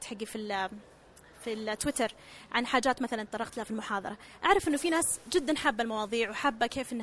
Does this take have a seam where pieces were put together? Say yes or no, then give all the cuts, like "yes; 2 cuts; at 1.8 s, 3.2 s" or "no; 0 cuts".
no; 0 cuts